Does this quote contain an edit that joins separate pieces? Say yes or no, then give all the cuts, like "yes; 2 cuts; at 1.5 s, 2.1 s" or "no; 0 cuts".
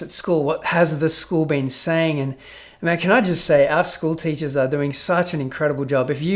no; 0 cuts